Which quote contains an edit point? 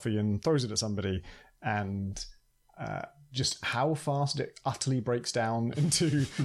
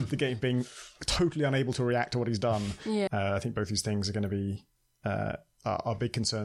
second; 1 cut; at 3.1 s

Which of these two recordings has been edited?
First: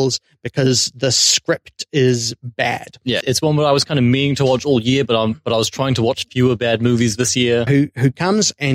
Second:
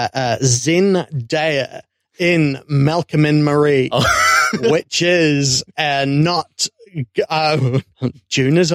first; 2 cuts; at 3.2 s, 7.7 s

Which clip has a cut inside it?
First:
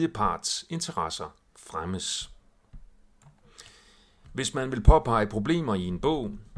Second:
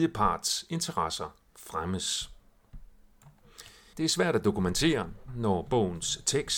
second; 2 cuts; at 3.9 s, 5.3 s

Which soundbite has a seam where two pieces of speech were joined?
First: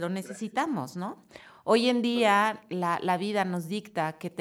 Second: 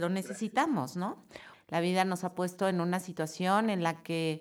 second; 1 cut; at 1.5 s

